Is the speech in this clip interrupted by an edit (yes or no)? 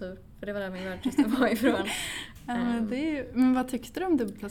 no